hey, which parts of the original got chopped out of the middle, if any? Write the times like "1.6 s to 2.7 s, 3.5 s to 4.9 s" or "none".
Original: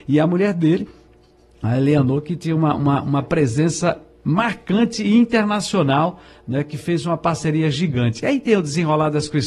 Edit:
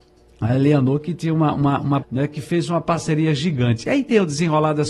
3.2 s to 6.4 s